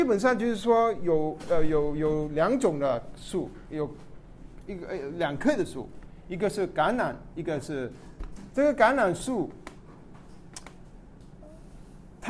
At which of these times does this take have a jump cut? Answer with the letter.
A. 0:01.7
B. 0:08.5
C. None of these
B